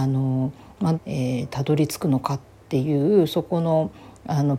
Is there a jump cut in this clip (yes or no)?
yes